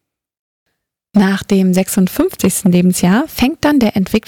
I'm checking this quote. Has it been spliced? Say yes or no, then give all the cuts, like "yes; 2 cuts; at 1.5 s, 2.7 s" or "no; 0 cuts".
no; 0 cuts